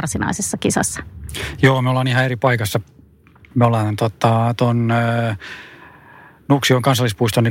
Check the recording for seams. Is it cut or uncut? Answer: uncut